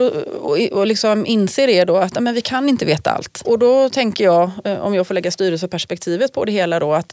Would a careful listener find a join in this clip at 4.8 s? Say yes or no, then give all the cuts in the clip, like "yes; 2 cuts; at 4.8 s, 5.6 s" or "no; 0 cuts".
no; 1 cut; at 3.4 s